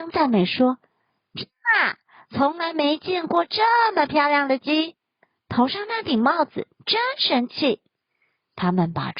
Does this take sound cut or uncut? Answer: uncut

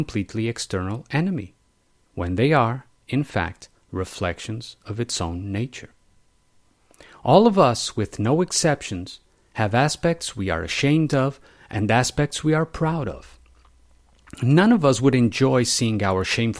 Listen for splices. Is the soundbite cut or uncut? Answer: uncut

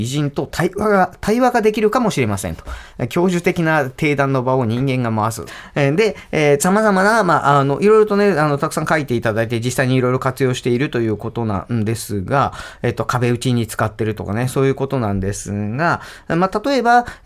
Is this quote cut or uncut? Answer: cut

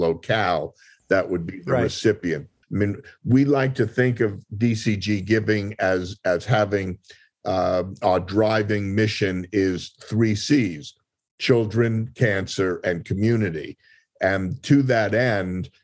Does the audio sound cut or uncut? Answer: cut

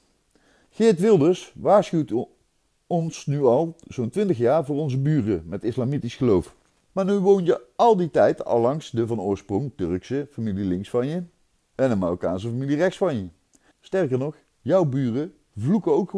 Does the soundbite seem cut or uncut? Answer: cut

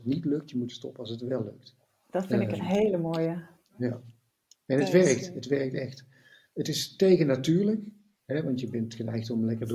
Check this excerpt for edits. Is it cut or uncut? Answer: uncut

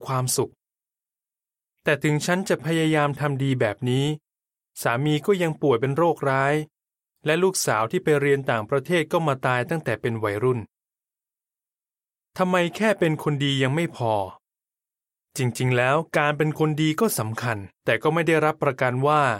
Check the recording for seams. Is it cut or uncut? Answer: uncut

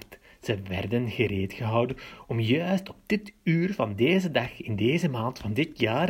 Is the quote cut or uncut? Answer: uncut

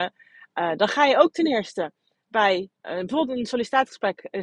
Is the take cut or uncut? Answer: cut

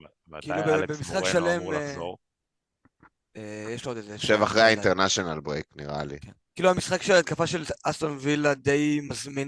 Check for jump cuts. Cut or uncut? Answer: cut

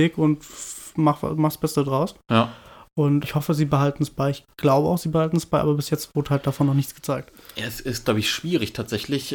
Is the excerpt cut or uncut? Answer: cut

